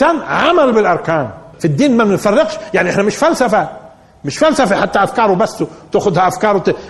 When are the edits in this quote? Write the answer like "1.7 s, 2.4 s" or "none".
1.5 s